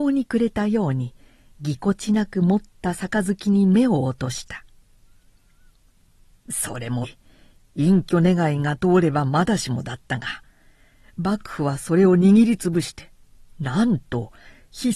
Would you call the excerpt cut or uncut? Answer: cut